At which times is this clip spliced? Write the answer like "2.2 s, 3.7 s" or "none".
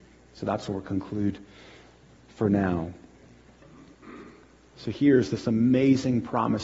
none